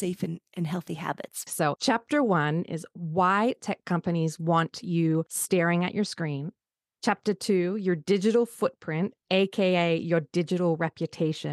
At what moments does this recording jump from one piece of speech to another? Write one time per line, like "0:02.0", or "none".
0:01.5